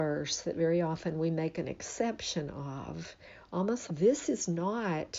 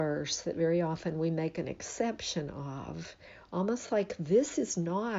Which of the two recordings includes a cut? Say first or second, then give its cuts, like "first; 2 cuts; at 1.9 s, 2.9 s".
first; 1 cut; at 3.9 s